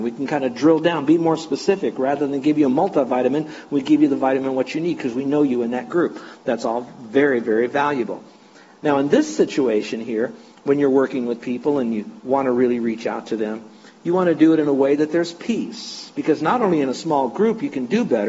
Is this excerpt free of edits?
yes; 0 cuts

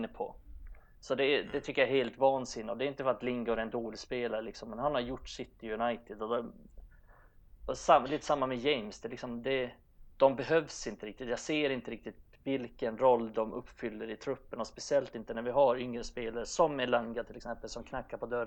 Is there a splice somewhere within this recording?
no; 0 cuts

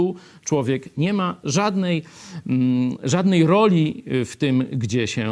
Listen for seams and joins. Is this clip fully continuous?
yes; 0 cuts

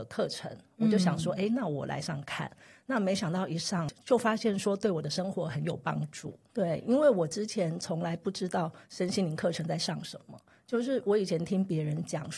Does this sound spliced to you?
yes; 2 cuts; at 2.0 s, 6.5 s

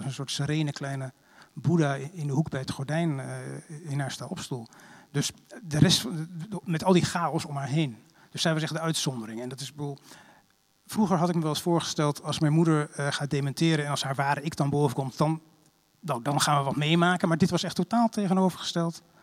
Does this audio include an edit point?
no; 0 cuts

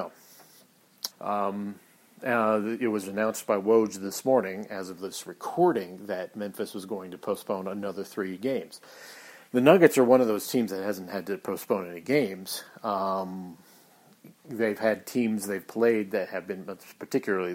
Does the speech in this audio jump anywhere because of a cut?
yes; 1 cut; at 1.1 s

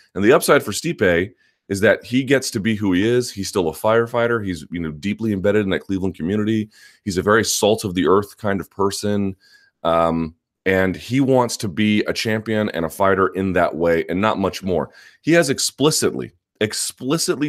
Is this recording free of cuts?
yes; 0 cuts

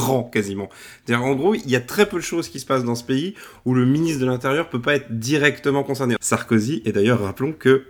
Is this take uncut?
no; 1 cut; at 6.2 s

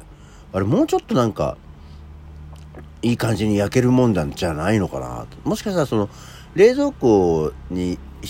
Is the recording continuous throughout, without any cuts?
yes; 0 cuts

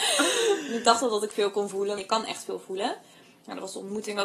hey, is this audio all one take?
no; 1 cut; at 2.0 s

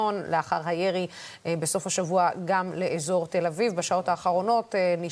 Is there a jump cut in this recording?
no; 0 cuts

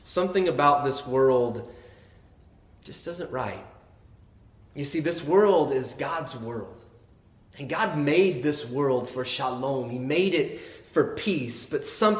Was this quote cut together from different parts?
no; 0 cuts

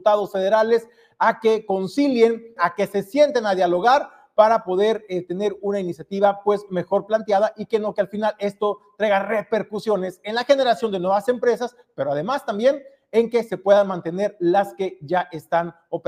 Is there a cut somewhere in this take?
yes; 1 cut; at 2.6 s

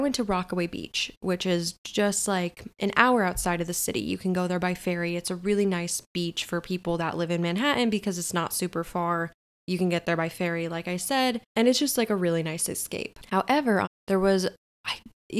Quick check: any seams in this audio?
yes; 1 cut; at 13.8 s

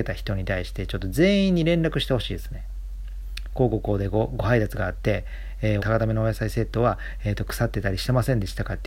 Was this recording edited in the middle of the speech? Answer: yes; 1 cut; at 5.8 s

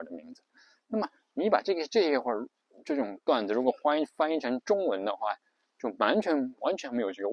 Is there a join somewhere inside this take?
no; 0 cuts

